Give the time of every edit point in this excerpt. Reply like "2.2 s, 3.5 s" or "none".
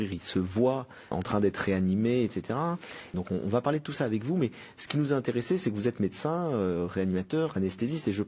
1.1 s, 3.1 s

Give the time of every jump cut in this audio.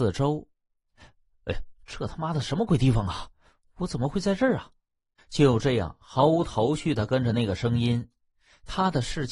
5.2 s

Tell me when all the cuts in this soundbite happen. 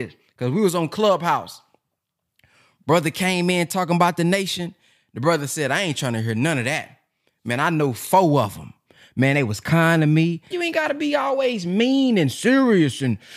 10.5 s

